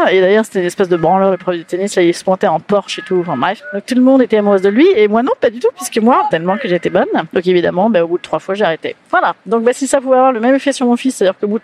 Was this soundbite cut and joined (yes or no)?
yes